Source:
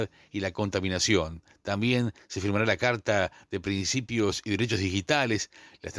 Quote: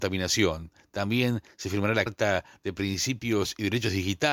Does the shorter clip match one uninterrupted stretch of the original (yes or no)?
no